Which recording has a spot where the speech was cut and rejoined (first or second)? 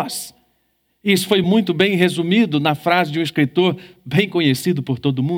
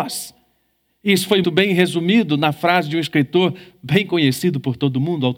second